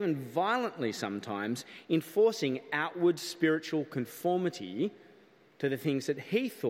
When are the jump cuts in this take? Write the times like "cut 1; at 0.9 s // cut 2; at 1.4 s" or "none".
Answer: none